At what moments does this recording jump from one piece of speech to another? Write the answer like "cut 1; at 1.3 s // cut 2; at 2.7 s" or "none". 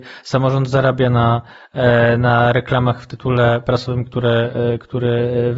none